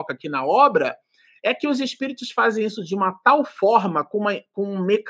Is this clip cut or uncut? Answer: uncut